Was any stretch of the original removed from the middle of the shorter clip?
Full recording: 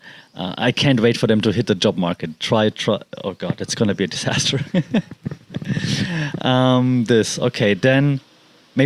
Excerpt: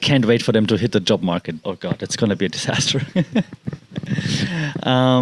yes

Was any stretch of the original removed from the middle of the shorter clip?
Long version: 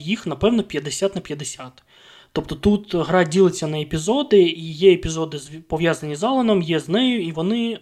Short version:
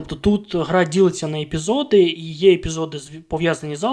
no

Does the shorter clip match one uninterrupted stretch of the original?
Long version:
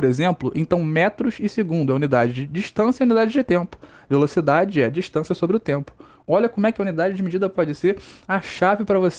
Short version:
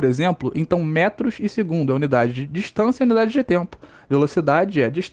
yes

